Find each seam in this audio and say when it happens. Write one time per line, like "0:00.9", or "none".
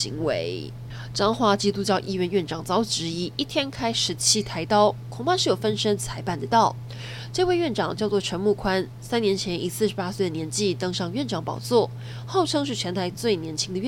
none